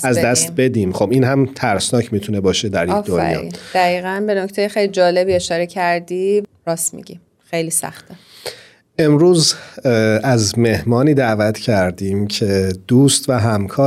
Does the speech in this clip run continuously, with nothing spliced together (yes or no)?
yes